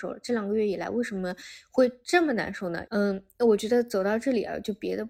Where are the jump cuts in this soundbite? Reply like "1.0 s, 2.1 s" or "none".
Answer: 2.9 s